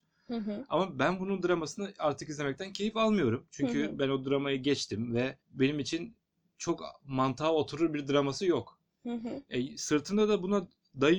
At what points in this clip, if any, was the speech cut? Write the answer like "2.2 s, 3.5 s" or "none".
5.4 s